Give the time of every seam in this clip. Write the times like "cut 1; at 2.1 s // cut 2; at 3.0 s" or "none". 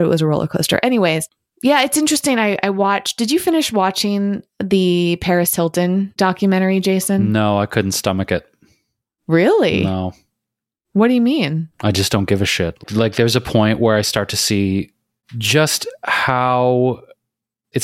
cut 1; at 11.7 s

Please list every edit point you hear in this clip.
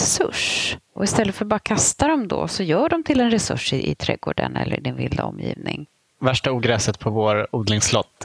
none

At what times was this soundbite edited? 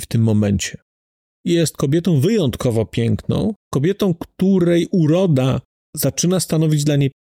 cut 1; at 1.3 s // cut 2; at 3.6 s

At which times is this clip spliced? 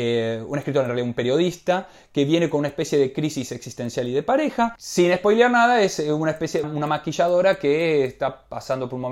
cut 1; at 4.8 s // cut 2; at 6.6 s

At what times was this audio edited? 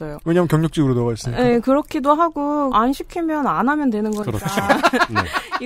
cut 1; at 2.7 s

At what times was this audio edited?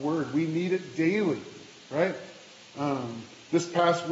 none

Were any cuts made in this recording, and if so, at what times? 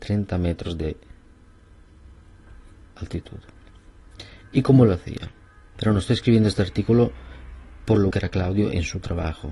cut 1; at 5.8 s // cut 2; at 8.1 s

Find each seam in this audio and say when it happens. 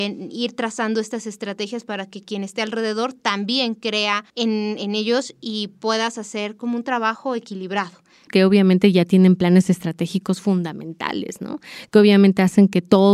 cut 1; at 4.3 s // cut 2; at 8.3 s

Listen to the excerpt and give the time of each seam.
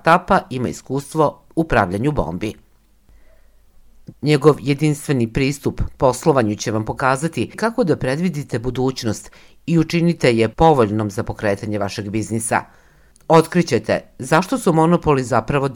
cut 1; at 4.1 s

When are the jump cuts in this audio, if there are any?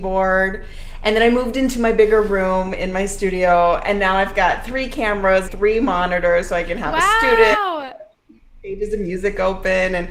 cut 1; at 5.5 s

